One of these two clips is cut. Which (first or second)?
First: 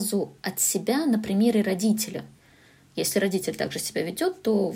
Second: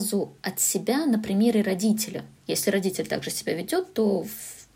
second